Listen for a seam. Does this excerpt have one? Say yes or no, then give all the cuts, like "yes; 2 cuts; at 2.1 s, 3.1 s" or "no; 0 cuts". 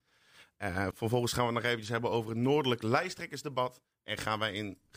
yes; 1 cut; at 0.9 s